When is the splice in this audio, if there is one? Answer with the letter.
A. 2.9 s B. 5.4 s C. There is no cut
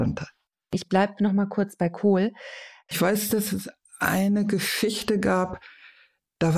A